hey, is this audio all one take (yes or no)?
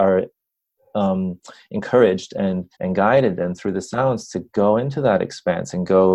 no